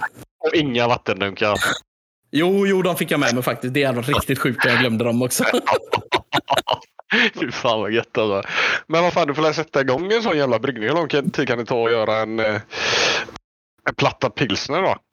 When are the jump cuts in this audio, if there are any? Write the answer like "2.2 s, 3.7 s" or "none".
none